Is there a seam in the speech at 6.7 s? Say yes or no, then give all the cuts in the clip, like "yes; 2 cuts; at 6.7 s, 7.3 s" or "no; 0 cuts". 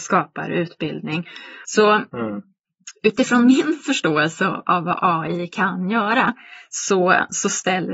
no; 1 cut; at 1.6 s